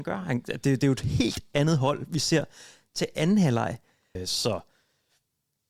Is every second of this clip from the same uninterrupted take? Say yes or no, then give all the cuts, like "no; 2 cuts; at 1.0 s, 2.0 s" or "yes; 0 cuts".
no; 1 cut; at 4.2 s